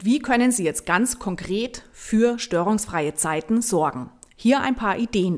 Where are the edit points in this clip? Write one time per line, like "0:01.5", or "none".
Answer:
none